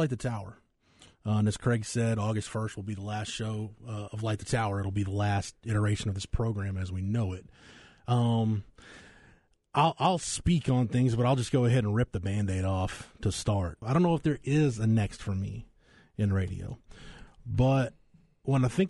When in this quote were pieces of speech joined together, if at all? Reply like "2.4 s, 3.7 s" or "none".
13.8 s